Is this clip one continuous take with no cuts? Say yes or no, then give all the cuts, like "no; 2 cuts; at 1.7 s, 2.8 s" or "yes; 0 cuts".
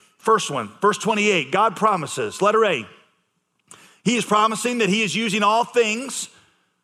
yes; 0 cuts